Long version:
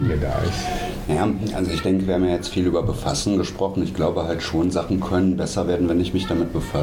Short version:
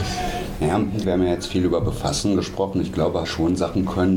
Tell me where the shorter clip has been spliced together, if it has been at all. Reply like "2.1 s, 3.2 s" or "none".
1.0 s, 3.2 s